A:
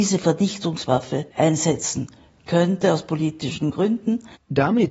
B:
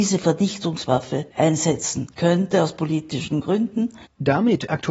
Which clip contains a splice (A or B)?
B